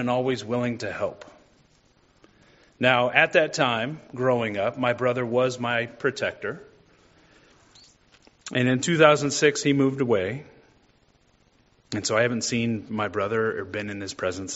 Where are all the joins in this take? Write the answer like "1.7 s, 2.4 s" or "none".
none

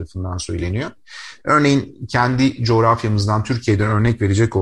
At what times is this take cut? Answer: 1.4 s

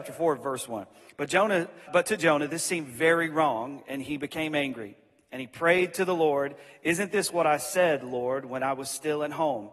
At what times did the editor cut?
1.9 s

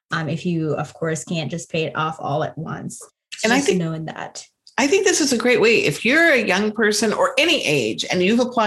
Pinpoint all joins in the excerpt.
none

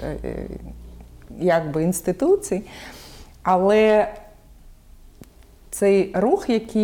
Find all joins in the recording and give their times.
none

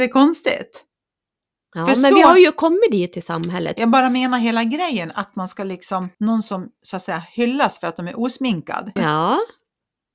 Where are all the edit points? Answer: 3.8 s, 6.1 s, 9.0 s

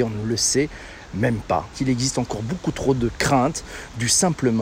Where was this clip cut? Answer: 1.7 s

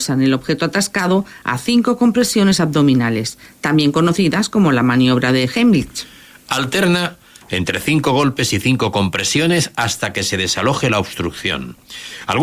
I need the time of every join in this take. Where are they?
none

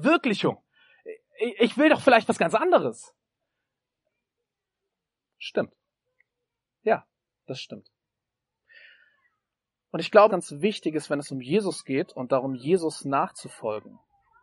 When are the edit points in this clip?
10.3 s

